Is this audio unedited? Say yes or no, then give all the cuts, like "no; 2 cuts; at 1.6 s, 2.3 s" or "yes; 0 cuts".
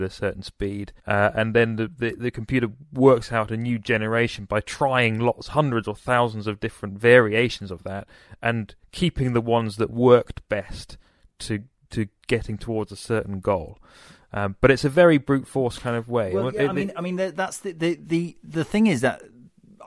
no; 1 cut; at 1.0 s